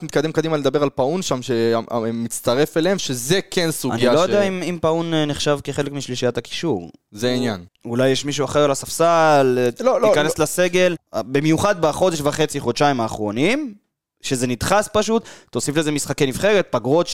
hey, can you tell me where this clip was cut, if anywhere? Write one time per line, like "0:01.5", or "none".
0:07.7
0:11.0